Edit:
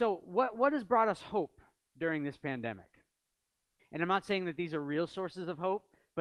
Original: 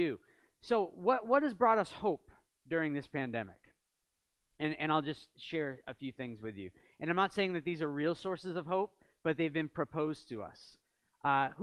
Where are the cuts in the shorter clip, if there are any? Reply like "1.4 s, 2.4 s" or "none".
3.8 s